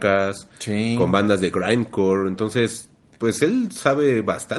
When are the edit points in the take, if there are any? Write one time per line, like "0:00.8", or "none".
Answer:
none